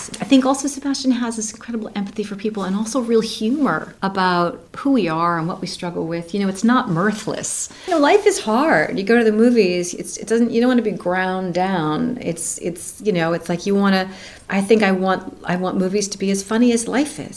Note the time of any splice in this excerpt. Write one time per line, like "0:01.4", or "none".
0:14.5